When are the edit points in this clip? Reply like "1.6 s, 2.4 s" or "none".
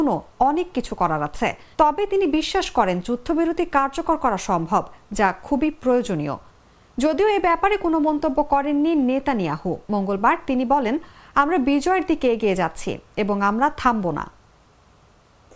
1.7 s, 9.8 s